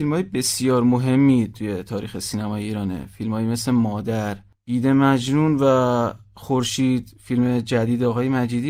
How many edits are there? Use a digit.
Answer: 1